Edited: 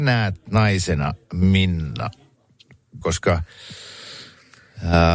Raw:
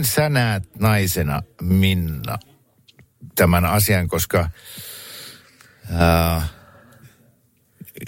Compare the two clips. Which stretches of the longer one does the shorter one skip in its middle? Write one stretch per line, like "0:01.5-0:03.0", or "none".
0:03.3-0:04.1